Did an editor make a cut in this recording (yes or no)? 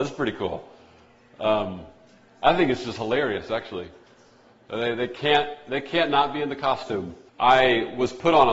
yes